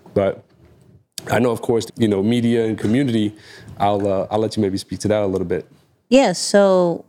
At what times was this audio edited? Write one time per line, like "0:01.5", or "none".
0:01.9

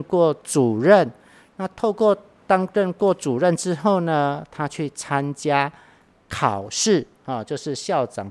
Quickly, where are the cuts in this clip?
none

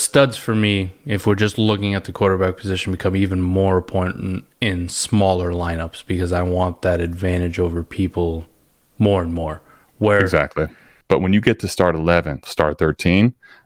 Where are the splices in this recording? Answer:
0:11.0
0:12.4

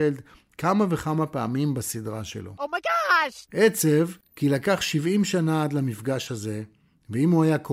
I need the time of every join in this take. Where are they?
0:03.5

